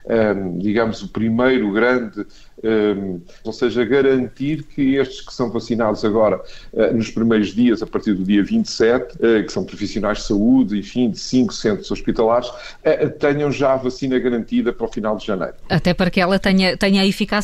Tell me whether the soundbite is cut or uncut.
cut